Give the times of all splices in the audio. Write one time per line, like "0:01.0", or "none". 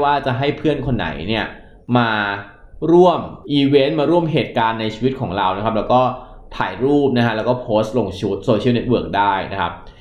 0:03.4

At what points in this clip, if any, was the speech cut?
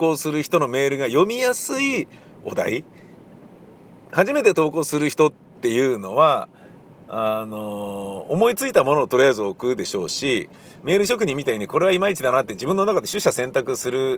none

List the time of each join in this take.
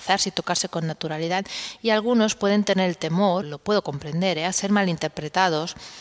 0:03.4

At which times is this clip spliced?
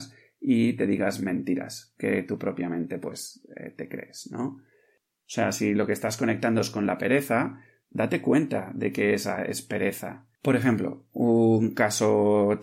0:07.8

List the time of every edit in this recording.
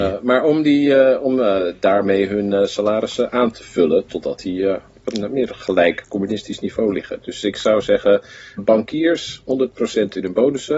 0:08.6

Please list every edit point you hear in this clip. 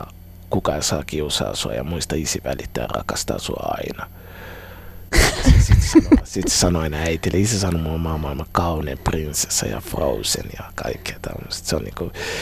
0:05.1

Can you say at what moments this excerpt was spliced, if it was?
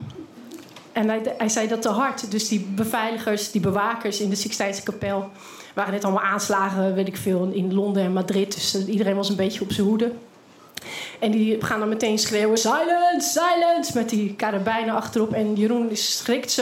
none

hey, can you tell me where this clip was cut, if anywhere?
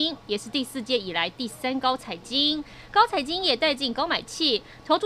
none

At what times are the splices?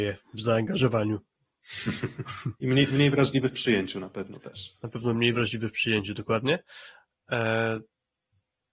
none

